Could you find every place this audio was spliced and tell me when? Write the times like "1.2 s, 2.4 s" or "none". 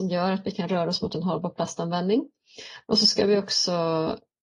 none